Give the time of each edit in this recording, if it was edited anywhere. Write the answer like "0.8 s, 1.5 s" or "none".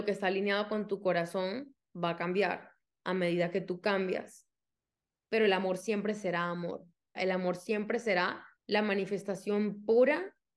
5.2 s, 7.1 s, 8.5 s